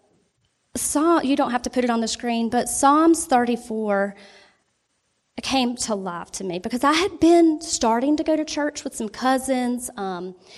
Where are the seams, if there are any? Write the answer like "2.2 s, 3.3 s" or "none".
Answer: none